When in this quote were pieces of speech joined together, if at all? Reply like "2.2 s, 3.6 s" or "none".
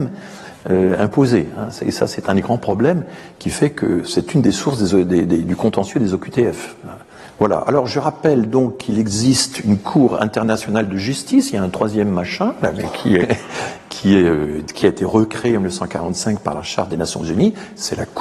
7.3 s, 13.2 s, 14.8 s